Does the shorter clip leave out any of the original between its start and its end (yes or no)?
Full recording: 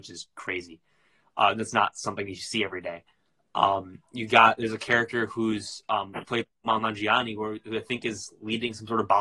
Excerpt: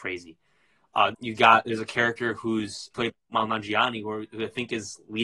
yes